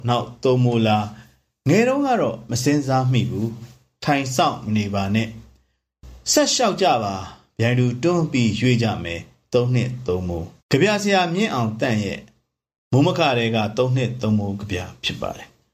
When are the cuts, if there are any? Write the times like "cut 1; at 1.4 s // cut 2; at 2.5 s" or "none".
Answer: cut 1; at 10.6 s

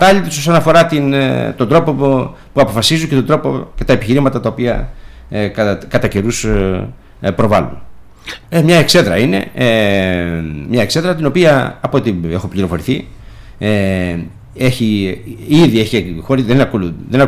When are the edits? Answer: cut 1; at 8.4 s

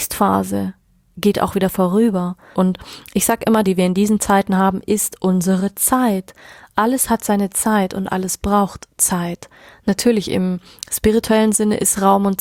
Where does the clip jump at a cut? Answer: cut 1; at 2.5 s // cut 2; at 3.6 s

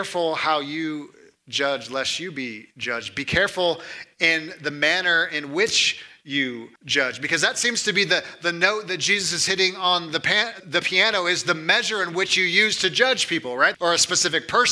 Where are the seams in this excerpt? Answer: cut 1; at 6.8 s // cut 2; at 10.6 s // cut 3; at 13.7 s

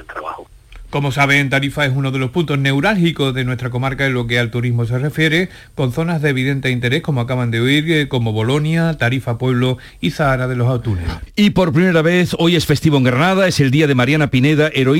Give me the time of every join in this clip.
cut 1; at 11.3 s

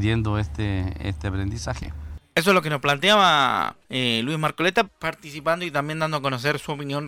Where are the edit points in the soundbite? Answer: cut 1; at 3.8 s // cut 2; at 4.8 s

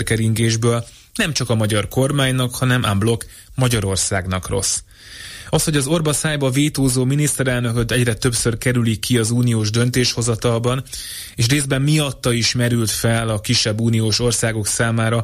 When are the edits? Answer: none

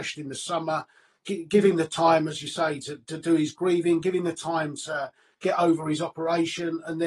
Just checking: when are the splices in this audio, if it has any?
none

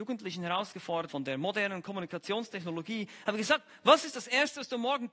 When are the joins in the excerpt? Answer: cut 1; at 1.1 s

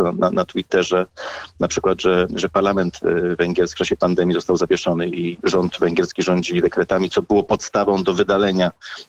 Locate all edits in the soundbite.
cut 1; at 1.5 s // cut 2; at 5.4 s

